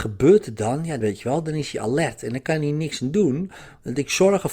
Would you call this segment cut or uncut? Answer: cut